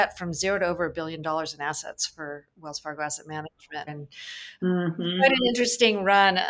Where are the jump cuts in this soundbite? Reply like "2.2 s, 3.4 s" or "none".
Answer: 3.9 s